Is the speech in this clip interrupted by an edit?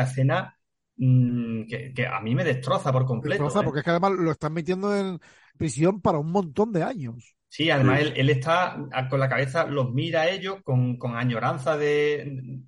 yes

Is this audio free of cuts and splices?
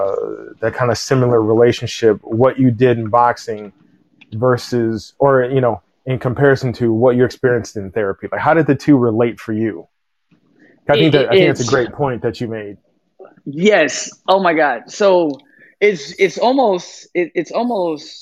yes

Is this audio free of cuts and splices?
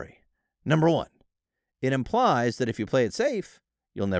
yes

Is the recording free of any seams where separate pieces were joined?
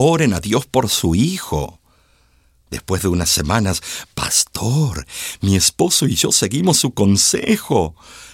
no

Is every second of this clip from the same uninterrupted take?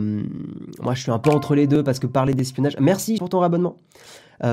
no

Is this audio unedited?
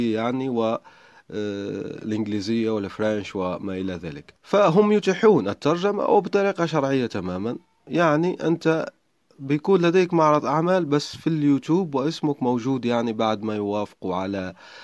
no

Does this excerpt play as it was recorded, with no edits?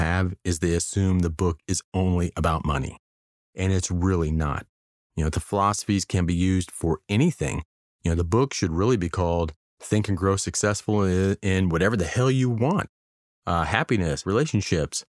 no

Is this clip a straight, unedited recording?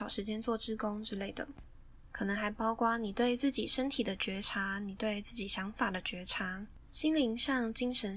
no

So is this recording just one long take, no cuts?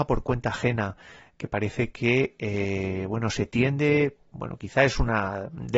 yes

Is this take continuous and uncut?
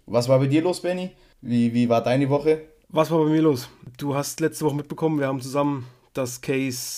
yes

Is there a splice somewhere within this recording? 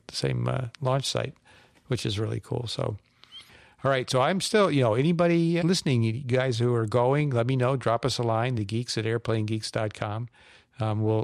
yes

